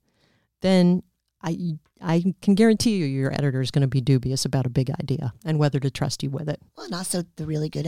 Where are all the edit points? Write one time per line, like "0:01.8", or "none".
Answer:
0:06.7